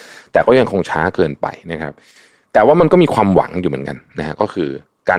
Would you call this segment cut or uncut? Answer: uncut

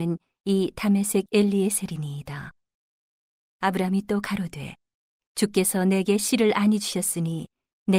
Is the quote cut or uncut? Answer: uncut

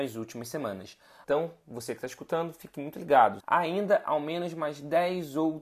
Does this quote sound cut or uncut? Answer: cut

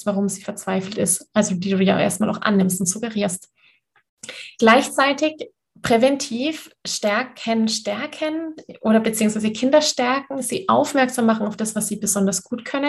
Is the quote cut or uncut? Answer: cut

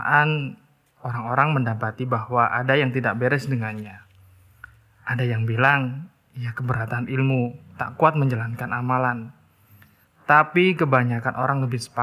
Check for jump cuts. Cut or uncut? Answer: uncut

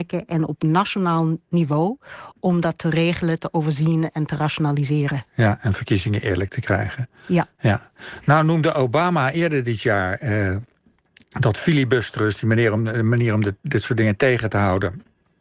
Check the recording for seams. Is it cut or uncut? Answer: uncut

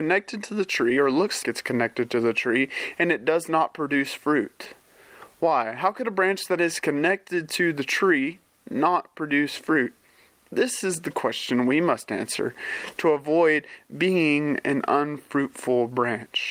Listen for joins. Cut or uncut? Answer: cut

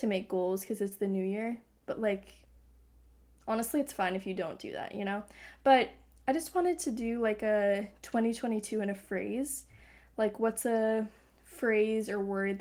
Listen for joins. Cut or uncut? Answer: uncut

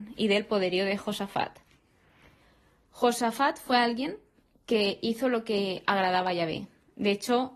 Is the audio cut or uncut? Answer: uncut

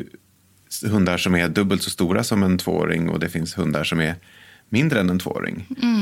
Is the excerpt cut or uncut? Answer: uncut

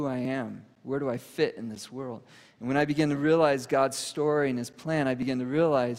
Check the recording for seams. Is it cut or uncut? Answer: uncut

